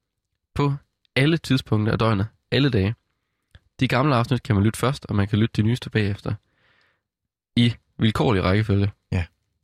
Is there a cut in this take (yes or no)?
no